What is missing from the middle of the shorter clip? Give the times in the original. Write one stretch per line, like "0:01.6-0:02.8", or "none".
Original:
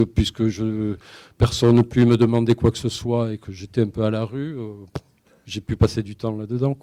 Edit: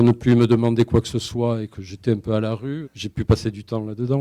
0:04.5-0:05.4